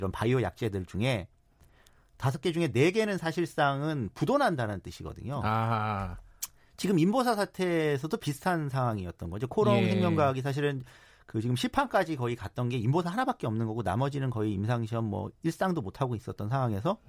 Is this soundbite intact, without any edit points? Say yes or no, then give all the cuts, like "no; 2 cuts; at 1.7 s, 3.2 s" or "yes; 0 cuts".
yes; 0 cuts